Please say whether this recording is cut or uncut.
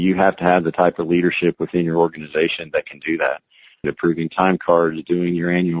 cut